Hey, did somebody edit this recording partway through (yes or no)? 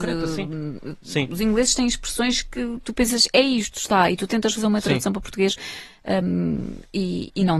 no